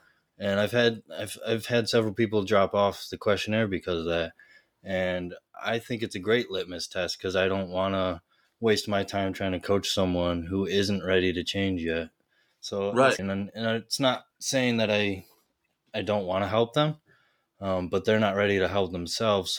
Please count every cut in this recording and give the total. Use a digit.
1